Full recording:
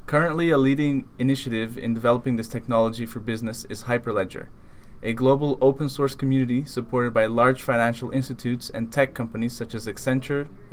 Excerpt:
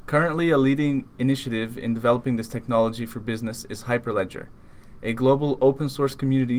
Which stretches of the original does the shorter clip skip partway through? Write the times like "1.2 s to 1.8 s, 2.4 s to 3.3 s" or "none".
none